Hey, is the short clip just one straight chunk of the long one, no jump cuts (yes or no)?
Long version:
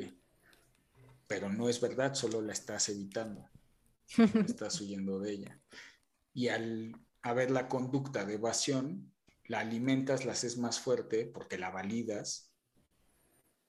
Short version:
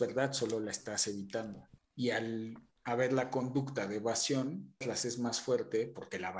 no